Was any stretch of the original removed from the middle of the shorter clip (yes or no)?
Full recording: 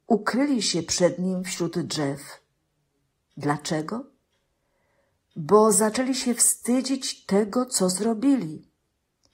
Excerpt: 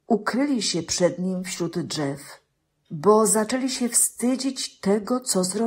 yes